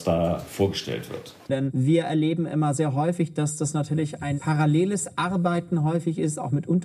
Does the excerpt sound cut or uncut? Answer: cut